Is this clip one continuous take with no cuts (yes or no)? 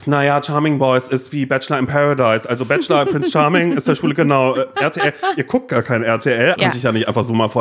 no